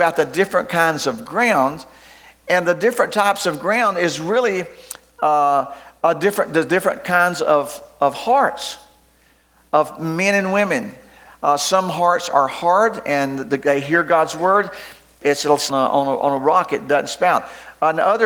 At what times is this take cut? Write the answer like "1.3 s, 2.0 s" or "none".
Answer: 15.7 s